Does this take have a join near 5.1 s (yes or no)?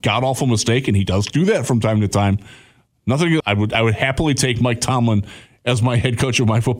no